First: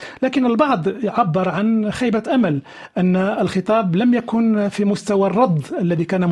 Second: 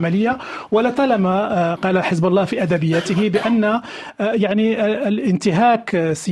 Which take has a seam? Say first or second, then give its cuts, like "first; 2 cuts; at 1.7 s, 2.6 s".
second; 1 cut; at 1.8 s